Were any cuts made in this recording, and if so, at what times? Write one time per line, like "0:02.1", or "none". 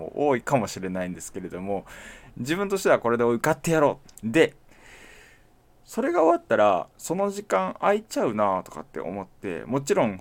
0:04.0